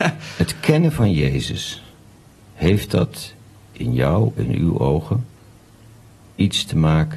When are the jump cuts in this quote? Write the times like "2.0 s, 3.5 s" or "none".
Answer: none